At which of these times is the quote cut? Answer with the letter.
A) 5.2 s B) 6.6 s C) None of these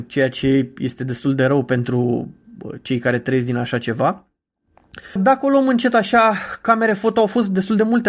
A